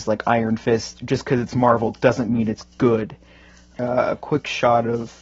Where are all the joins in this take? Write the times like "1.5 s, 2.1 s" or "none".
3.8 s